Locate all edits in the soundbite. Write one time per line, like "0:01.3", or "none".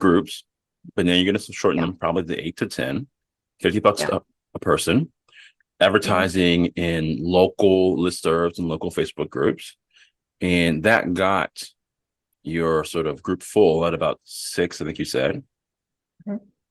none